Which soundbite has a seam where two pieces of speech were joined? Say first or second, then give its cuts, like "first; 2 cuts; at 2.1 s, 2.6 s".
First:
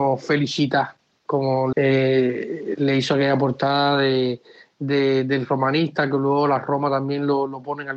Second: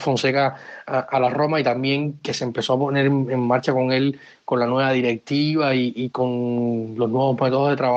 first; 1 cut; at 1.7 s